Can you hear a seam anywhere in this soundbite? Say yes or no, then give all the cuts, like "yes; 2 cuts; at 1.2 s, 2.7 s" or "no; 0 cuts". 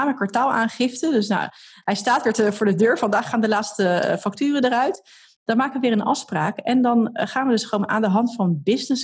no; 0 cuts